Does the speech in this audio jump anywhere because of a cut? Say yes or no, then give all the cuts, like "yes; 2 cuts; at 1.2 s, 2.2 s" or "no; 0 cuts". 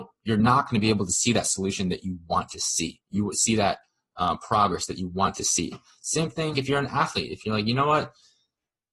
yes; 1 cut; at 6.5 s